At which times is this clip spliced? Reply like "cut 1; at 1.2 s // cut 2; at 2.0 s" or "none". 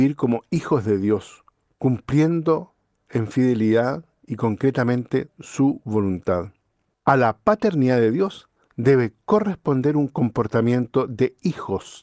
cut 1; at 7.0 s